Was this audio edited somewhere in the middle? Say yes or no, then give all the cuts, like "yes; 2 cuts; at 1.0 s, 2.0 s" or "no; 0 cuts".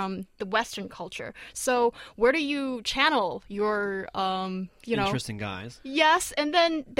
no; 0 cuts